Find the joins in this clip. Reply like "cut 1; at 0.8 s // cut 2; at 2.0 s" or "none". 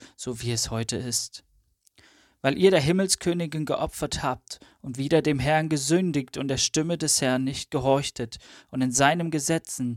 none